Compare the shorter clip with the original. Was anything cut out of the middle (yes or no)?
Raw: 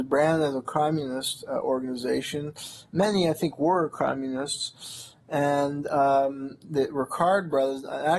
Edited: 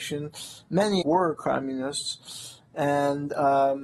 yes